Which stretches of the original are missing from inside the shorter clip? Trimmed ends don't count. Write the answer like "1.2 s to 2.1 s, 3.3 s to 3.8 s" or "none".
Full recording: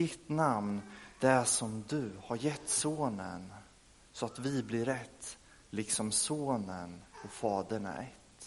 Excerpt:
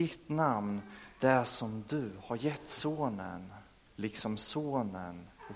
3.9 s to 5.6 s